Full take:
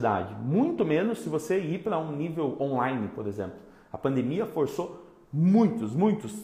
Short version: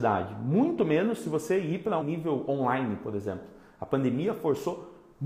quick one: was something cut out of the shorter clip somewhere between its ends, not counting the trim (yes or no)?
yes